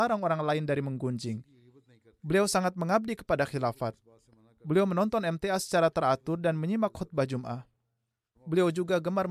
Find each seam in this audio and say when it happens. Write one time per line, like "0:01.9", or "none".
0:08.4